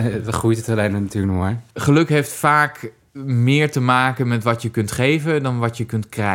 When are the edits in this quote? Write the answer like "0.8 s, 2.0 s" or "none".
1.7 s, 3.1 s